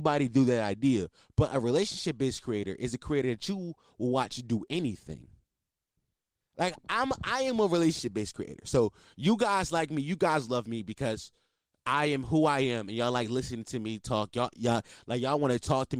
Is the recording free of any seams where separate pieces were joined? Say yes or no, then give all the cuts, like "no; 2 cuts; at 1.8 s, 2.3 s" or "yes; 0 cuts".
yes; 0 cuts